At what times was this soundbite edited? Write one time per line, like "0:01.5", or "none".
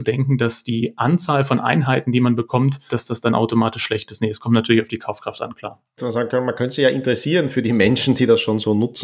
0:02.9
0:06.0